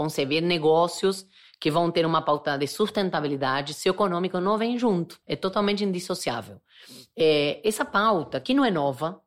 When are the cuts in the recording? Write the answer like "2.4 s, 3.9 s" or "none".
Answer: 5.2 s